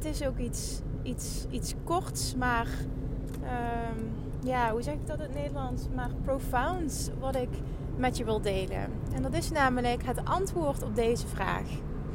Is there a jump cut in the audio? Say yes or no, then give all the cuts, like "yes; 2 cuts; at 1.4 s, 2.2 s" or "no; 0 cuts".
no; 0 cuts